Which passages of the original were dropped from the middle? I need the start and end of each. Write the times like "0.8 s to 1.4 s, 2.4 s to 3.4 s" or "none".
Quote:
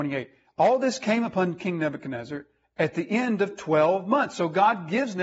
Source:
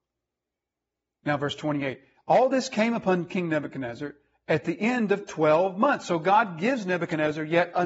none